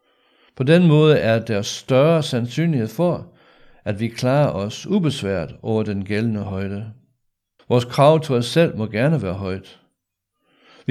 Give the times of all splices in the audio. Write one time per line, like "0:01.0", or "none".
0:07.6

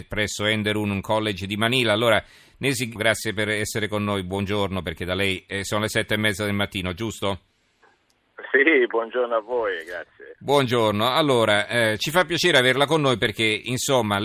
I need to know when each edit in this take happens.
0:03.0

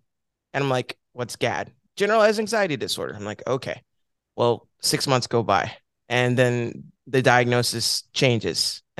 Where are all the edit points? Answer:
none

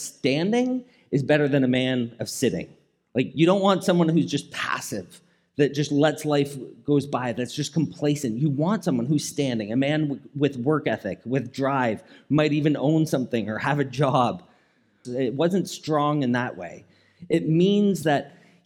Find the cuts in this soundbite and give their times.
0:15.0

